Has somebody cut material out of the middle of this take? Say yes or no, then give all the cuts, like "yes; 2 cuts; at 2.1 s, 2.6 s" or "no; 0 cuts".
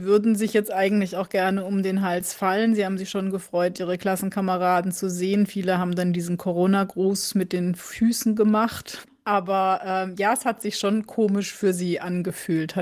no; 0 cuts